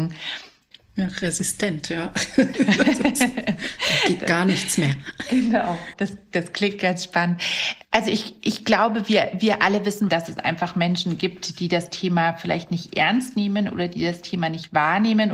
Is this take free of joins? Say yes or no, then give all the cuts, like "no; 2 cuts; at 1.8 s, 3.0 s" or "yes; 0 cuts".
no; 2 cuts; at 2.5 s, 10.1 s